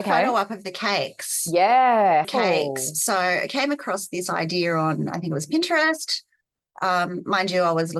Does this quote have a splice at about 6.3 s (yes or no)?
no